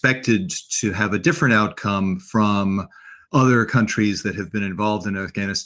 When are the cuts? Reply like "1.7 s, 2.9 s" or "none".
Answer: 3.2 s